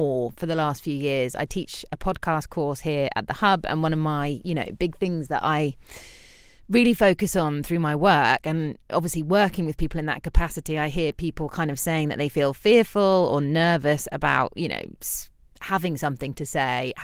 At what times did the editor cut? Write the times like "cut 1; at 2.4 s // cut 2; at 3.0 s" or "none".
none